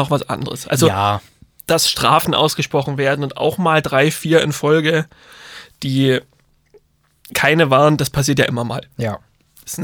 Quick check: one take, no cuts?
yes; 0 cuts

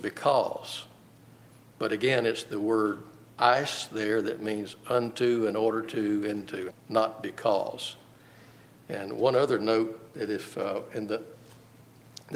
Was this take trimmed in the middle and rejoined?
yes; 1 cut; at 6.7 s

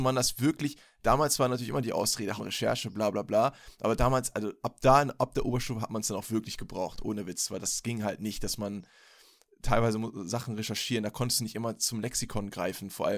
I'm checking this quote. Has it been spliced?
yes; 1 cut; at 2.4 s

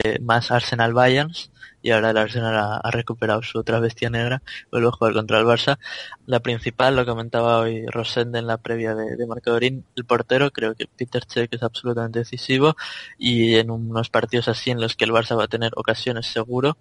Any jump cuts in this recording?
yes; 1 cut; at 6.2 s

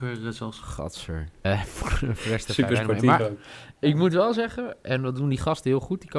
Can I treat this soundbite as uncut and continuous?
no; 1 cut; at 1.4 s

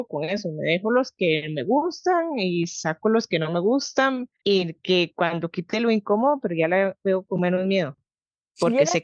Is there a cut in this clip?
yes; 2 cuts; at 4.4 s, 6.4 s

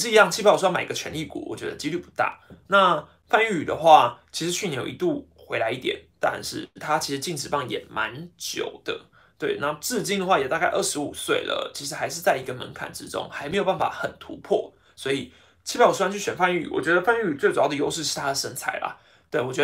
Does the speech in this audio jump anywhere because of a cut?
no; 0 cuts

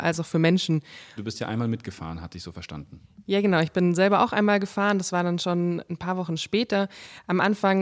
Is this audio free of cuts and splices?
no; 1 cut; at 1.2 s

